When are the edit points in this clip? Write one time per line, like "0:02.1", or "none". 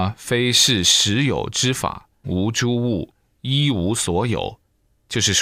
0:02.2